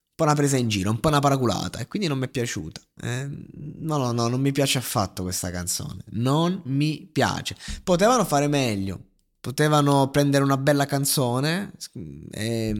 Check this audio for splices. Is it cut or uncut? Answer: cut